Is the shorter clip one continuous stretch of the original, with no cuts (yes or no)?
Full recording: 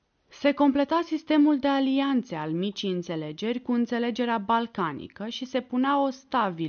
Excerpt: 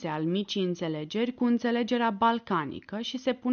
yes